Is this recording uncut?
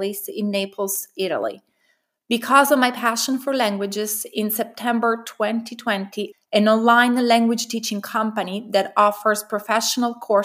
no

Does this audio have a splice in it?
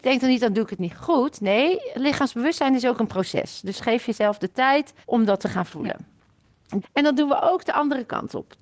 yes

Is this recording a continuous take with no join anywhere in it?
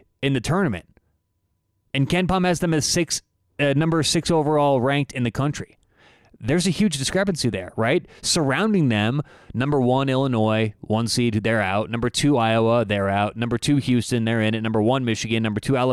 yes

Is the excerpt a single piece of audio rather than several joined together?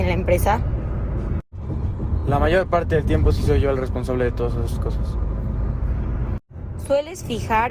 yes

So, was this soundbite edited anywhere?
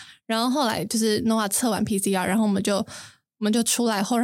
no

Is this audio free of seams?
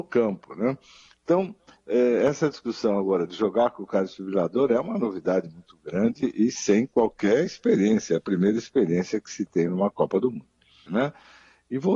no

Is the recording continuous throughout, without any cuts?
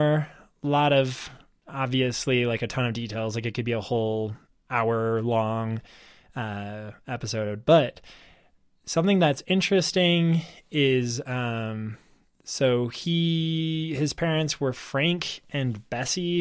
yes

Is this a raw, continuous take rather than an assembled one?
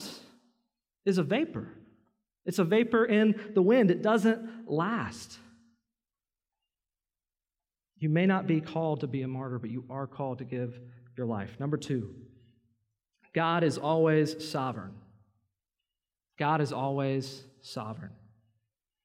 yes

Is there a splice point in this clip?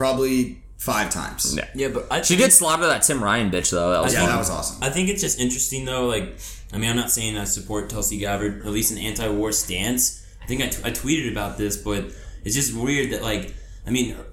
yes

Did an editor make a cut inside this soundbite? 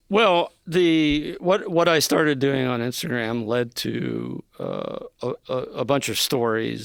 no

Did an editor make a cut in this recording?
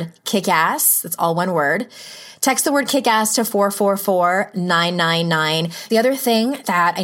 yes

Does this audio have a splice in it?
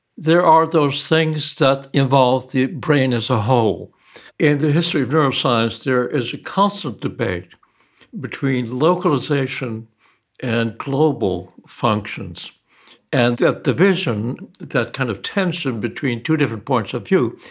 yes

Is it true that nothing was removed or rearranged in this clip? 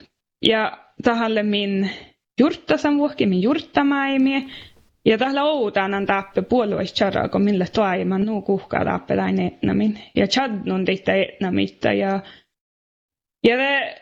no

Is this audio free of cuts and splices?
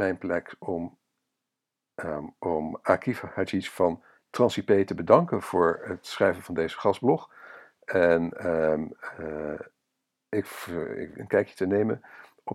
no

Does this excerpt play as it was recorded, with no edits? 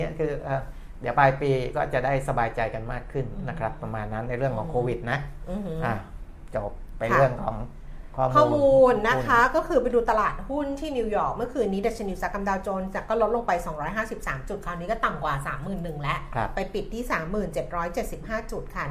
no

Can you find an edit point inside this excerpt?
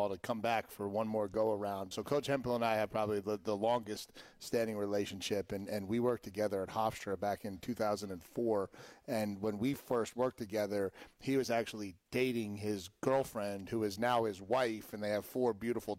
yes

